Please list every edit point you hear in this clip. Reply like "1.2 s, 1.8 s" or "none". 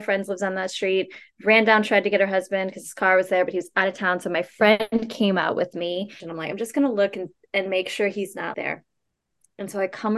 6.2 s, 8.5 s